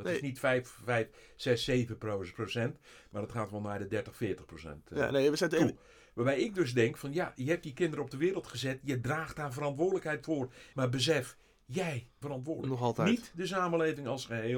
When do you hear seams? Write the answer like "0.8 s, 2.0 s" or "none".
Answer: 10.7 s, 12.2 s